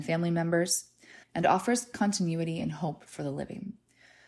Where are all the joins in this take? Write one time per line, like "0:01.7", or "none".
0:01.2